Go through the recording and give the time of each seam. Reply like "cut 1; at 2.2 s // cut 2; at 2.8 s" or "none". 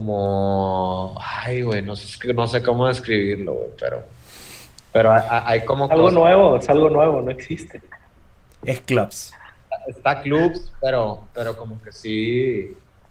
none

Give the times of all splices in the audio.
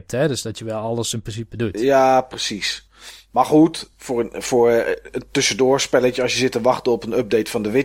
none

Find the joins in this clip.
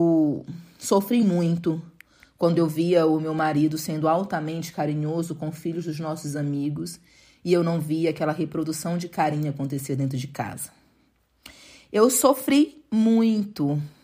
none

